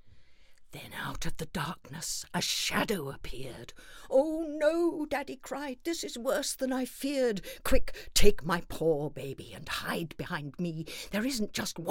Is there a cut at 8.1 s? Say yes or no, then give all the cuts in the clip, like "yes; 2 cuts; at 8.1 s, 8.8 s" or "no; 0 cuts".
no; 0 cuts